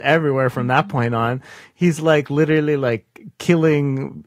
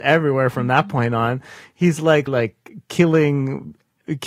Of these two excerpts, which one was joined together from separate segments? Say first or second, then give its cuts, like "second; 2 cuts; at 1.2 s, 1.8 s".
second; 1 cut; at 2.3 s